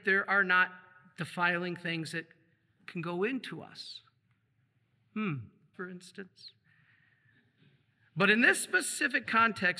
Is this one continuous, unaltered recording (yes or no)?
no